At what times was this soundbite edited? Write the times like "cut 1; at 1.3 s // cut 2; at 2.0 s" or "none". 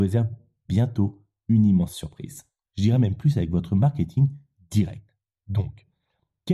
cut 1; at 2.7 s